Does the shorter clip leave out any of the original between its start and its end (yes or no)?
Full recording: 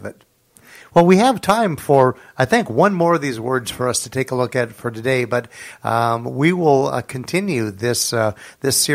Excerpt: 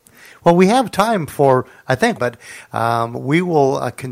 yes